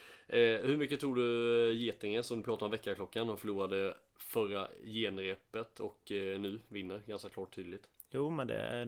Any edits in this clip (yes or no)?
no